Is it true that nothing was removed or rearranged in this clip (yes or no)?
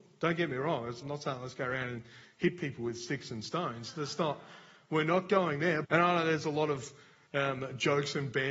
no